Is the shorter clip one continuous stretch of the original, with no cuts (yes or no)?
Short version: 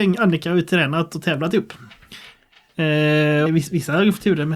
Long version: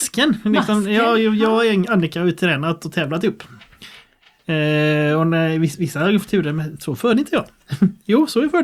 no